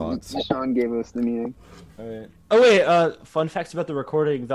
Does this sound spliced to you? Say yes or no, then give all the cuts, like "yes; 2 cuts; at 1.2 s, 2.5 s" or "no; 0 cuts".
no; 0 cuts